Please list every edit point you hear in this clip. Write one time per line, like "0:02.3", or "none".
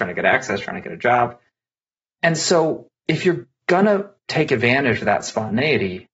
0:02.0
0:04.2